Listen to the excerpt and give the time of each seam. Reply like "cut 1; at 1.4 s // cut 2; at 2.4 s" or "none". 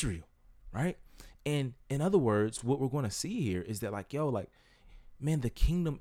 none

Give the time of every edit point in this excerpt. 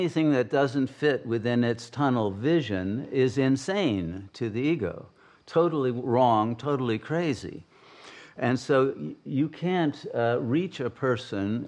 none

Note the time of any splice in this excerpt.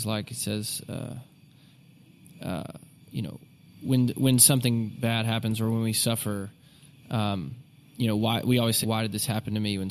cut 1; at 8.8 s

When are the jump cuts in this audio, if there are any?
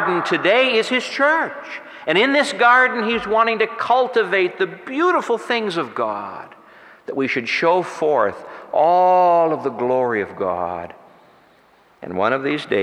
none

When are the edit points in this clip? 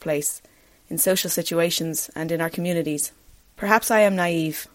cut 1; at 3.4 s

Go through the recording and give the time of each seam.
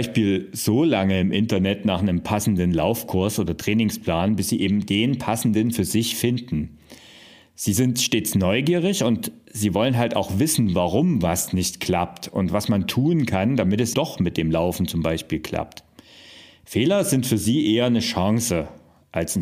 cut 1; at 13.9 s

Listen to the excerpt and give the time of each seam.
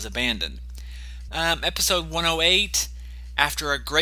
cut 1; at 1.3 s

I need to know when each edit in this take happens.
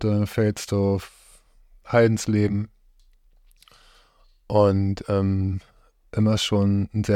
cut 1; at 1.8 s

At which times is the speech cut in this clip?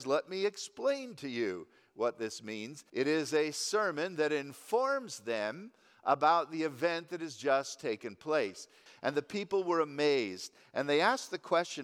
cut 1; at 2.9 s // cut 2; at 8.9 s

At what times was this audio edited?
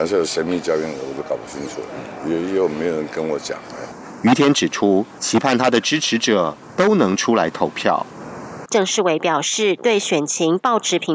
cut 1; at 5.2 s // cut 2; at 8.7 s

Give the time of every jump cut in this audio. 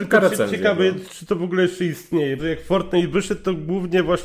cut 1; at 1.0 s // cut 2; at 2.4 s

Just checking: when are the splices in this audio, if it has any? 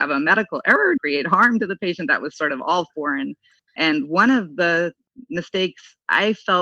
cut 1; at 1.0 s // cut 2; at 3.7 s

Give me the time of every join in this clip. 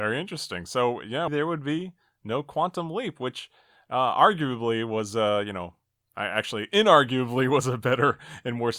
cut 1; at 1.3 s

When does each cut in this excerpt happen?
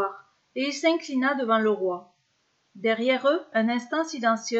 cut 1; at 3.5 s

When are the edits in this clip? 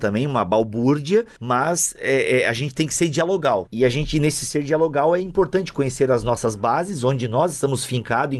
none

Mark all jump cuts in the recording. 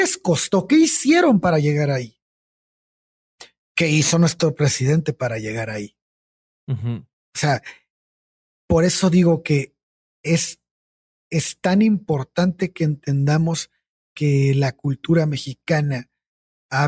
none

